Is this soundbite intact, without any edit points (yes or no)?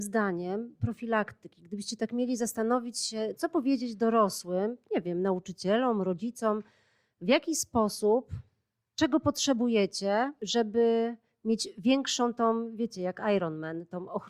yes